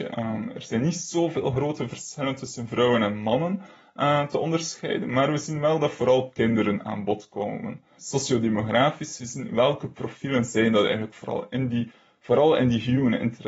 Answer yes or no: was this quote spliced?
yes